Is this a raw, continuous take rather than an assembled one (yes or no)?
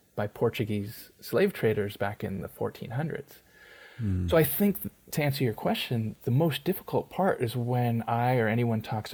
yes